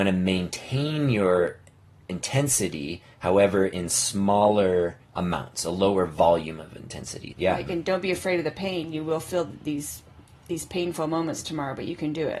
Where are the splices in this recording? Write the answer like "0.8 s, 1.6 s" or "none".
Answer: 5.0 s, 7.3 s